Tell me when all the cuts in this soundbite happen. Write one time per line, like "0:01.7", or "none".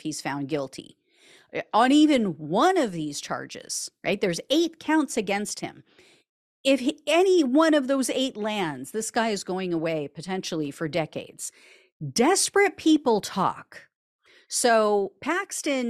none